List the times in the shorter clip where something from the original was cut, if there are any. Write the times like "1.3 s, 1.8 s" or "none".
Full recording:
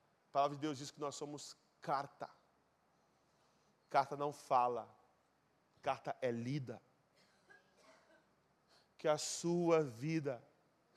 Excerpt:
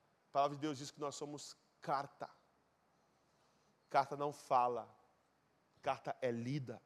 none